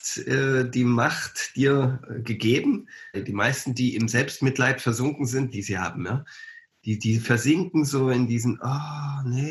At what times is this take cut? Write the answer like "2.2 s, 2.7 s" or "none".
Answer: 3.1 s, 5.5 s